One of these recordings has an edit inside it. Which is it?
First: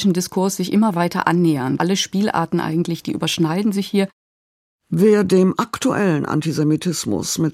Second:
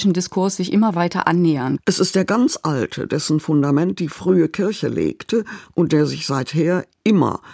second; 1 cut; at 1.8 s

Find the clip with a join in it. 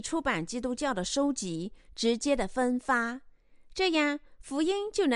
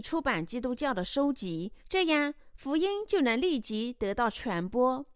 second; 1 cut; at 1.8 s

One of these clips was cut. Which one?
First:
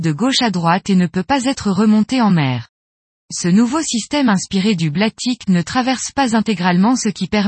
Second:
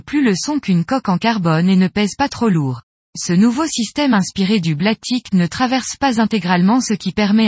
second; 1 cut; at 3.0 s

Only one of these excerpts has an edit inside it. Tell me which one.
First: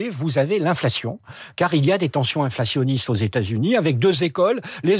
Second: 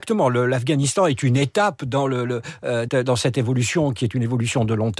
second; 1 cut; at 2.9 s

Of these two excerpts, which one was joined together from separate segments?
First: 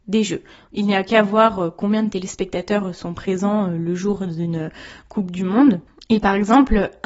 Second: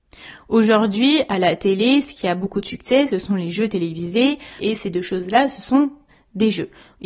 second; 1 cut; at 4.6 s

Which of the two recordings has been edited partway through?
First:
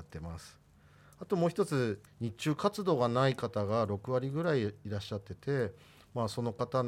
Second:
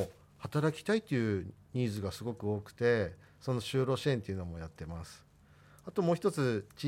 first; 1 cut; at 2.1 s

